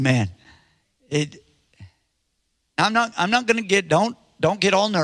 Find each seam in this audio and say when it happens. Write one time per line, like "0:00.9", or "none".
none